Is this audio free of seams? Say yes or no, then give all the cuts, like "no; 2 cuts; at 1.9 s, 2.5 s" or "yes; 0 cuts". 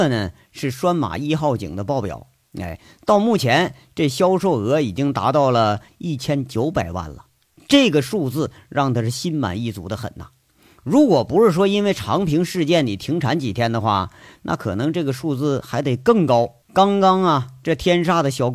no; 1 cut; at 16.6 s